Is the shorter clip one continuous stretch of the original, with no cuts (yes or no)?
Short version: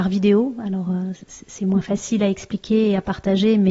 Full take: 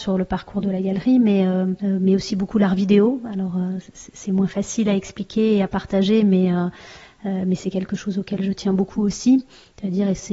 yes